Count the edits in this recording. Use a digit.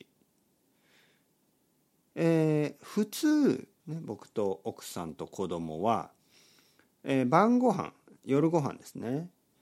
1